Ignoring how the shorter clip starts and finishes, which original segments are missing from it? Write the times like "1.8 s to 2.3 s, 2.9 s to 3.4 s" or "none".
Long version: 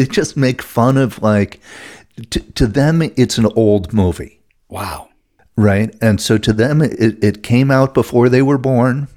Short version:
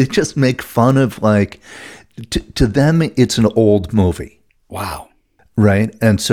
none